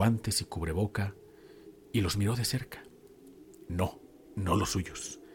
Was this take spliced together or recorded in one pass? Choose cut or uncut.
cut